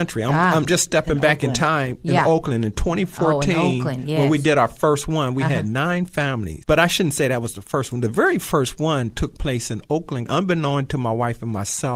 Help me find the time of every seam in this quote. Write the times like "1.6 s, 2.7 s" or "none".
6.6 s, 10.3 s